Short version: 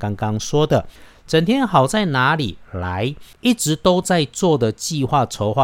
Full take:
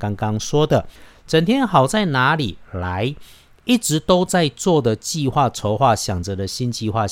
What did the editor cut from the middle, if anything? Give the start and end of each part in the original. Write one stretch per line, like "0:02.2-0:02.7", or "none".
0:03.3-0:03.6